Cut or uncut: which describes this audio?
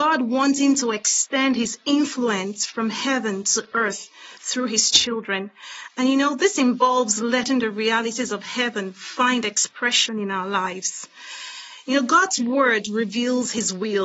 uncut